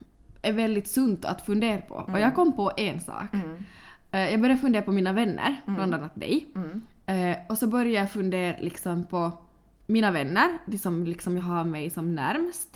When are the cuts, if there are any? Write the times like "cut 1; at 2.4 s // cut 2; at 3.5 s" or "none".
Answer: none